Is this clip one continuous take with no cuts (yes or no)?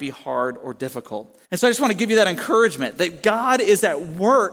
no